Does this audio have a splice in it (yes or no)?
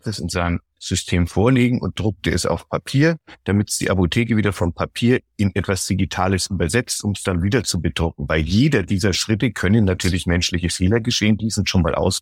no